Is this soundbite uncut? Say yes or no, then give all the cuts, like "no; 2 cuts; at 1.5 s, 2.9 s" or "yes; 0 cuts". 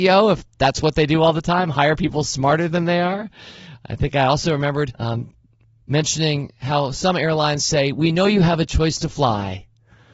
no; 1 cut; at 4.9 s